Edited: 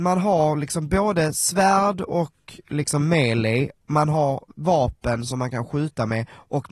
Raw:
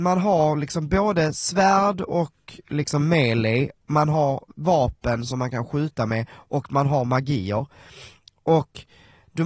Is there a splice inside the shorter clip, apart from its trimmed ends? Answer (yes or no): no